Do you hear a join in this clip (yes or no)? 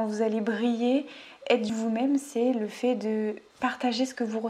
yes